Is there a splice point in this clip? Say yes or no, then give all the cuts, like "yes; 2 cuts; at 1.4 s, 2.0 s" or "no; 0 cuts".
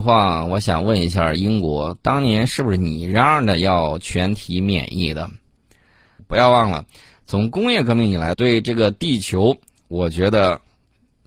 yes; 2 cuts; at 6.2 s, 8.3 s